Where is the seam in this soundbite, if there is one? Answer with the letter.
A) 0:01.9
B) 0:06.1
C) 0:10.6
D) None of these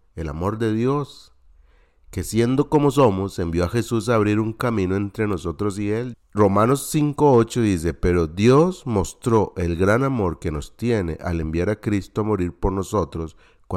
B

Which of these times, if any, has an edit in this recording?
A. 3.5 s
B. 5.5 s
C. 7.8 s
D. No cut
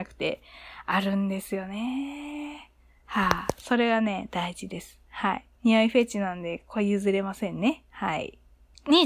B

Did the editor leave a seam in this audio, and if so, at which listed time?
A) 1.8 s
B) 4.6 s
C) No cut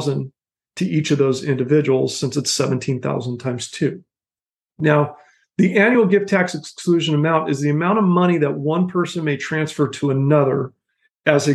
B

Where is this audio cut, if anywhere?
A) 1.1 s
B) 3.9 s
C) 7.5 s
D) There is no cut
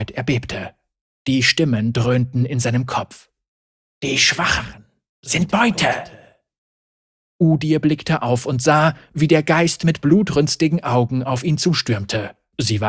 D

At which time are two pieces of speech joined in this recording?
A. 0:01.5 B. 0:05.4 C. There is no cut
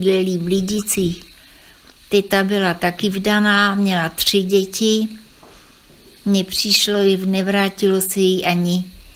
C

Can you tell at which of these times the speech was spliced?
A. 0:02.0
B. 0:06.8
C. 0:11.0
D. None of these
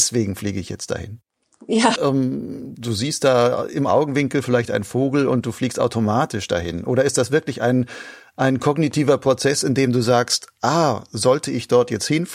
A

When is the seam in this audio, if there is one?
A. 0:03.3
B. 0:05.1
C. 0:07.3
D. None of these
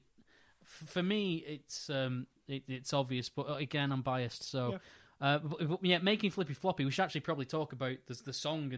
D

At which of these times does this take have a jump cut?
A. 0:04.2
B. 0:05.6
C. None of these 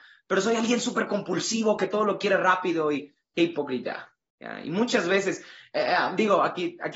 C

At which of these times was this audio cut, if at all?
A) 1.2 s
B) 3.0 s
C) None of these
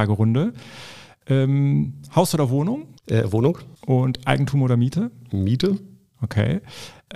B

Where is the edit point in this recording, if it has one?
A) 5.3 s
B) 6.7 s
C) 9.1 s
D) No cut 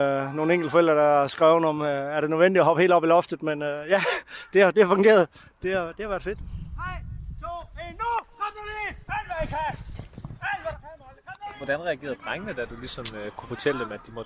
C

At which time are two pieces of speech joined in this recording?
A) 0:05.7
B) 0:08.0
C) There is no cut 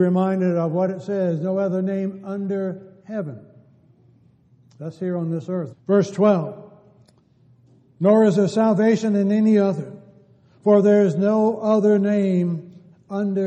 A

